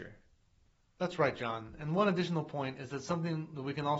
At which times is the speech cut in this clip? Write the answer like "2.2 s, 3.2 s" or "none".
none